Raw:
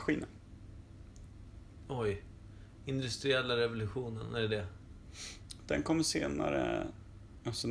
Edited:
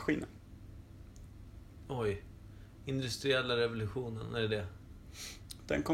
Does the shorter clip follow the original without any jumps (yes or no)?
yes